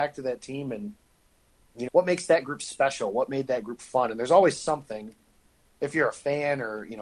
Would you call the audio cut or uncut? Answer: cut